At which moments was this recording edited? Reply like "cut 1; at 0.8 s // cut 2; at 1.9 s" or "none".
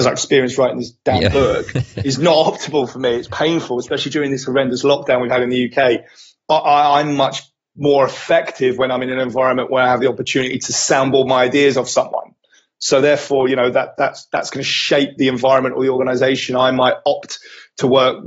none